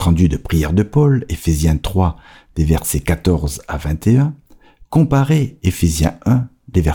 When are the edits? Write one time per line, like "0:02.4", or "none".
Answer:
none